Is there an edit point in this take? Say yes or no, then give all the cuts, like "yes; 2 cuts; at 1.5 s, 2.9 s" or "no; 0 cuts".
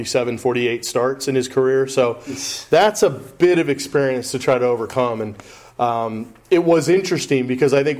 no; 0 cuts